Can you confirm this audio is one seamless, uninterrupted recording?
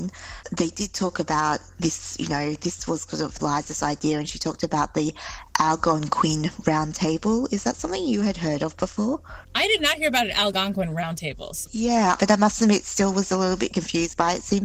no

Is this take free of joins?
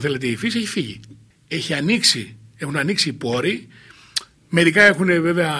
yes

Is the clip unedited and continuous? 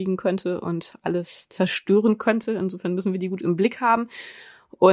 yes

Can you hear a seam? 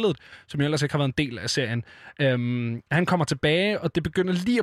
no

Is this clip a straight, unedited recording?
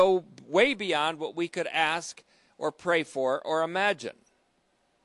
yes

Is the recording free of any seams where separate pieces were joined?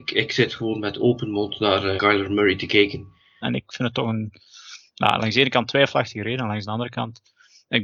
no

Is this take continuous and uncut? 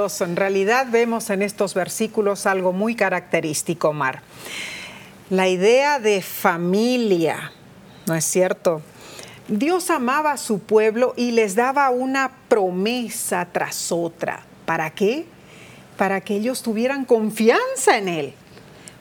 yes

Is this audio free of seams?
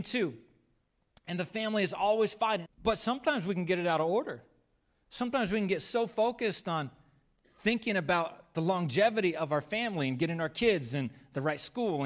no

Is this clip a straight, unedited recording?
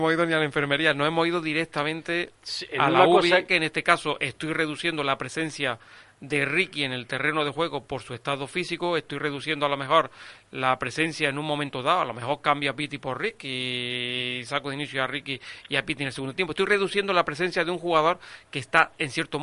no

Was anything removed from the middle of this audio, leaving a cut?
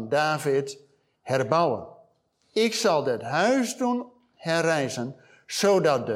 yes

